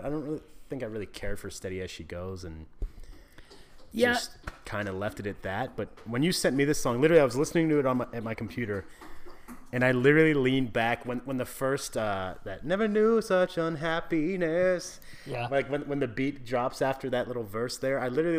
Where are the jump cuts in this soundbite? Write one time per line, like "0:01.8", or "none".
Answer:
none

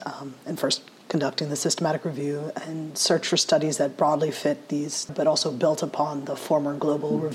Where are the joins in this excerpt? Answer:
0:05.1

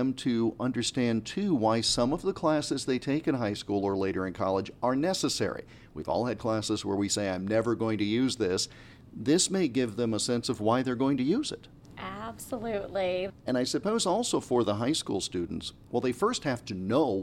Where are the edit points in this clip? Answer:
0:13.3
0:15.9

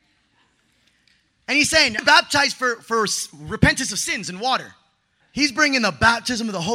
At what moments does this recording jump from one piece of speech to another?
0:02.0
0:05.2

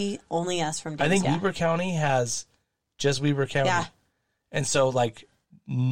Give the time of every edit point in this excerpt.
0:01.2

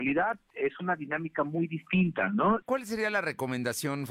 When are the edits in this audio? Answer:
0:02.6

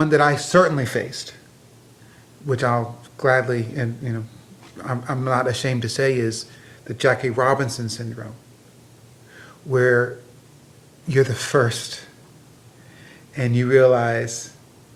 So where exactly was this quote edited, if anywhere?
none

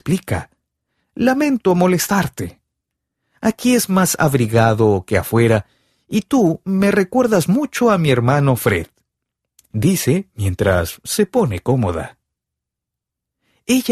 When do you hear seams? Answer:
none

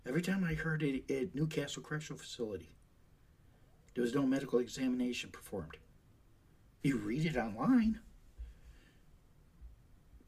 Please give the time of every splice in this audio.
none

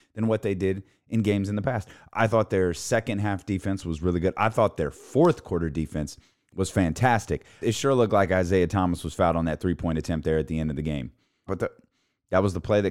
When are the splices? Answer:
0:07.6
0:11.5

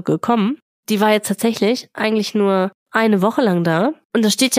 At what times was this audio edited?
none

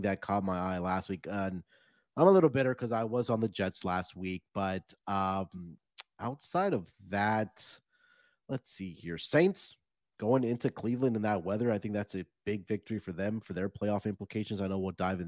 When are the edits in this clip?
none

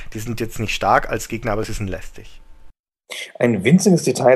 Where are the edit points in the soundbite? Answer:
none

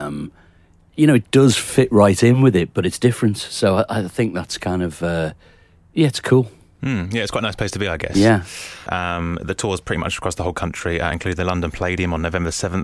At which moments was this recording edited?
0:08.9

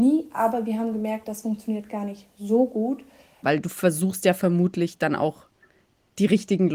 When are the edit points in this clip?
0:03.4

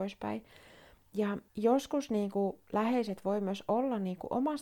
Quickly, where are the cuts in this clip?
0:01.5

